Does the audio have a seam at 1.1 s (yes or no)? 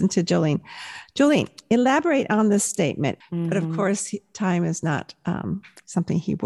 no